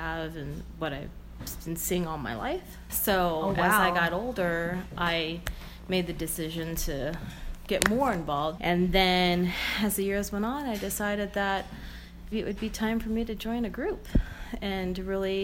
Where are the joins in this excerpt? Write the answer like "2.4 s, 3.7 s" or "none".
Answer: 2.9 s, 8.6 s, 12.3 s